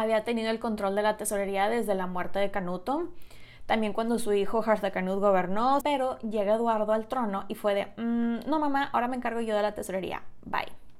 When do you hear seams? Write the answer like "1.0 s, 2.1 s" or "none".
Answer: 5.8 s